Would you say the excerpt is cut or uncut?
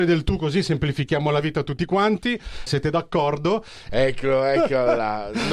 cut